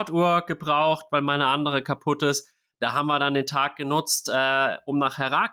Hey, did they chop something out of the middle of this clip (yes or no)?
no